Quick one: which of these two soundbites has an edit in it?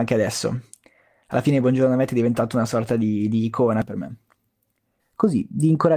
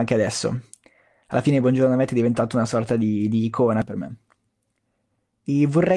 first; 1 cut; at 5.0 s

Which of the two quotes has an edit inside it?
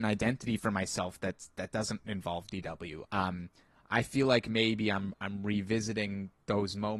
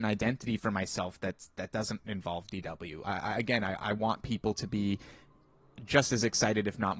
first; 1 cut; at 3.0 s

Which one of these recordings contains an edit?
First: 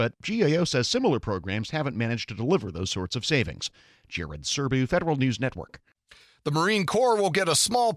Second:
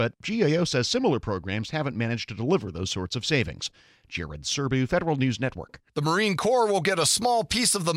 second; 1 cut; at 5.9 s

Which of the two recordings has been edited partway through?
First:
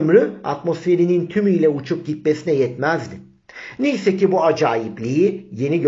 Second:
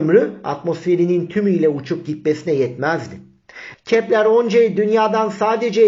second; 1 cut; at 3.7 s

